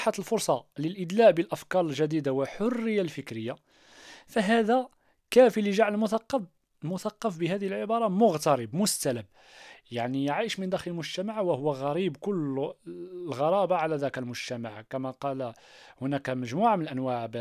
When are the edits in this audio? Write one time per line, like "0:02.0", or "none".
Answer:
none